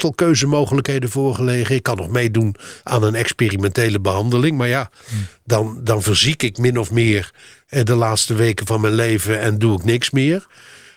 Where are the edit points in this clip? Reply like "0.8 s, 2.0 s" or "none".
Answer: none

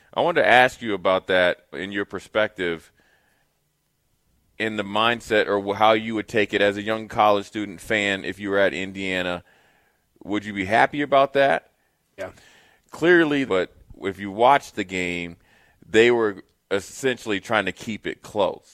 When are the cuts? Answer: 1.7 s, 12.2 s, 13.5 s

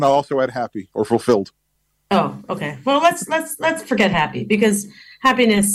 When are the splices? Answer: none

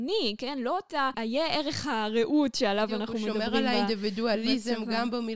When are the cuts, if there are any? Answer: 1.1 s

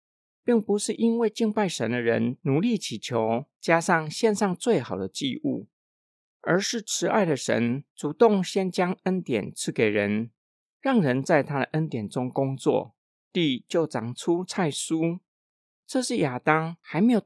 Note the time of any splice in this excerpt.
none

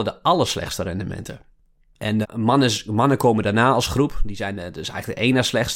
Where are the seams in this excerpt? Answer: 2.2 s

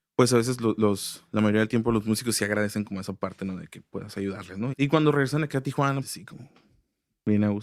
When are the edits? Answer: 4.7 s, 6.0 s

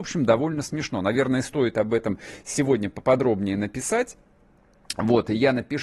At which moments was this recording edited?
none

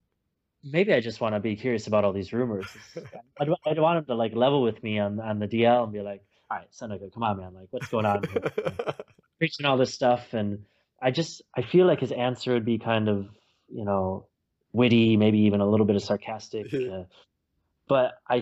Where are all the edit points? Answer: none

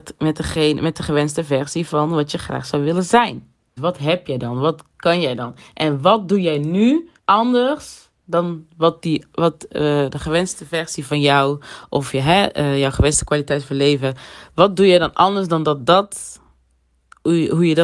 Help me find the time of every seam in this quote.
3.8 s, 7.2 s

